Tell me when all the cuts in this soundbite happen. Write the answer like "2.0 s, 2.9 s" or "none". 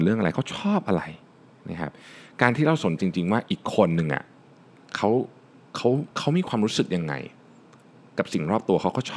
3.0 s, 6.1 s

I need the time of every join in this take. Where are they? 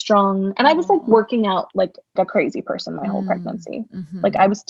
2.2 s

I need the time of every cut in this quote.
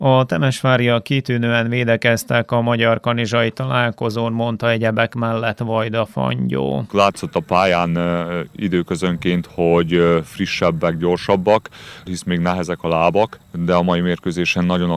6.9 s, 12.1 s

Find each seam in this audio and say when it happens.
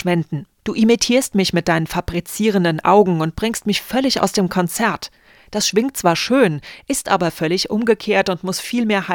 none

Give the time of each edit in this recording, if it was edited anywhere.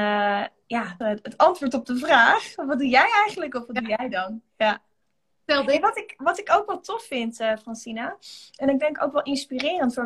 1.0 s

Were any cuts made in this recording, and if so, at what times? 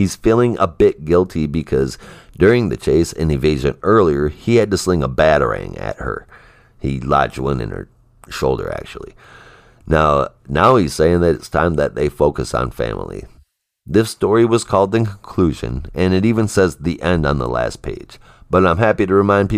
none

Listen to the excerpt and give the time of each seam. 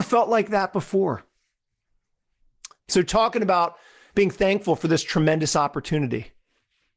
2.8 s

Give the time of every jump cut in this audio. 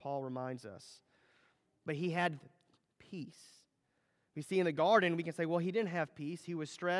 none

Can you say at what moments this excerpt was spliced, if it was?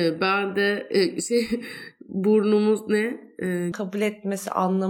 3.7 s

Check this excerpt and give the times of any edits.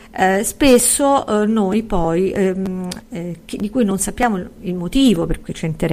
3.0 s

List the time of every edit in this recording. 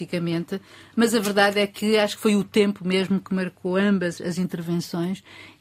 4.2 s

